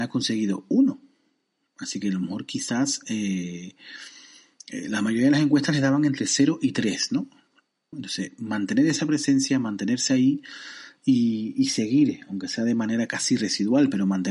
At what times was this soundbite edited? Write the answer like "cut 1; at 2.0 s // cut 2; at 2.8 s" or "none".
cut 1; at 7.9 s